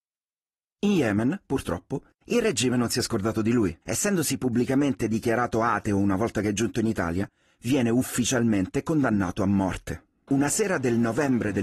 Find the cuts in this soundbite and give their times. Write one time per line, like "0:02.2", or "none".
0:03.8
0:10.3